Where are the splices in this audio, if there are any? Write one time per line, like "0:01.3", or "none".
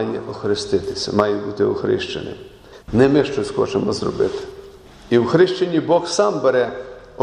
0:02.8